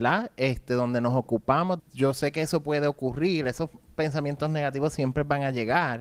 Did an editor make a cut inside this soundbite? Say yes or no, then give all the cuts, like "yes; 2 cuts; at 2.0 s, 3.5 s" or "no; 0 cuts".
yes; 1 cut; at 1.8 s